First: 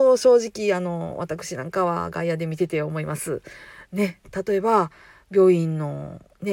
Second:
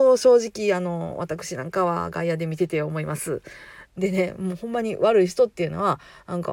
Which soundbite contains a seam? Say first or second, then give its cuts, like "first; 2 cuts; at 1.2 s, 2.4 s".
second; 1 cut; at 3.9 s